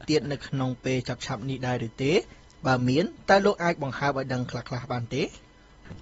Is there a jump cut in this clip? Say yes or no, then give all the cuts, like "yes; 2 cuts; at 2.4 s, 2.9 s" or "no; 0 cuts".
no; 0 cuts